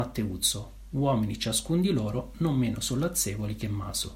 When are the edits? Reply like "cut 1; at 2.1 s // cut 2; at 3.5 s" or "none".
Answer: none